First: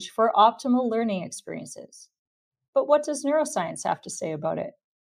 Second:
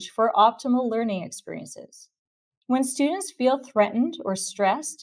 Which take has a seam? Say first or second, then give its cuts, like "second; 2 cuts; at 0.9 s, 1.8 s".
second; 1 cut; at 2.6 s